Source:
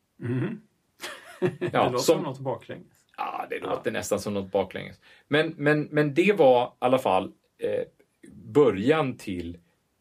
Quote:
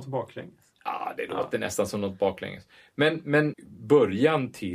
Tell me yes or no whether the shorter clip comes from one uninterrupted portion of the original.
no